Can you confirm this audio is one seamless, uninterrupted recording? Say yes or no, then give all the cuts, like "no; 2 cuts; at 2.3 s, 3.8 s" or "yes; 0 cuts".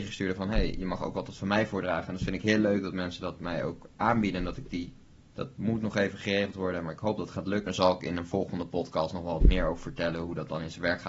no; 2 cuts; at 5.3 s, 7.7 s